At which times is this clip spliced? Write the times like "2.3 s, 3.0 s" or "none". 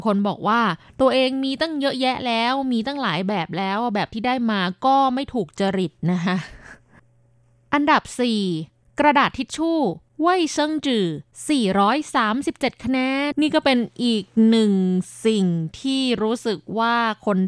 13.3 s